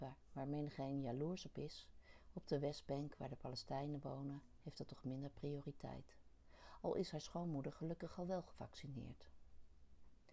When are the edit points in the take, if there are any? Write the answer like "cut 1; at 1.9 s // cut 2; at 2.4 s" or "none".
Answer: none